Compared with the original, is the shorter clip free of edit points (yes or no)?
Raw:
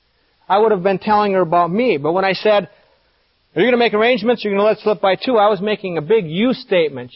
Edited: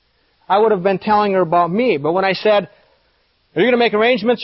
yes